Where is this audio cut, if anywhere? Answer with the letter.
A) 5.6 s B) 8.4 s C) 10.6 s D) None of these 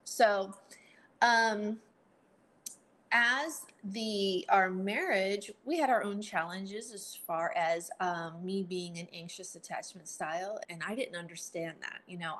C